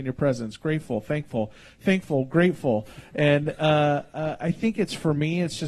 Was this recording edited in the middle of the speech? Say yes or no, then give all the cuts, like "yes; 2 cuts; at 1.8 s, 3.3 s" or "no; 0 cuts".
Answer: no; 0 cuts